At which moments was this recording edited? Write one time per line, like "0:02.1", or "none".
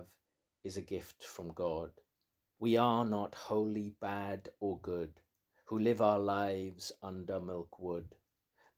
0:02.6